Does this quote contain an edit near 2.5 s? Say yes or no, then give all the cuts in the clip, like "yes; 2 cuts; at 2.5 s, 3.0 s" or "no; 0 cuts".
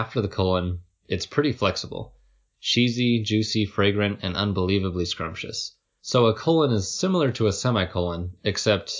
yes; 2 cuts; at 2.5 s, 6.0 s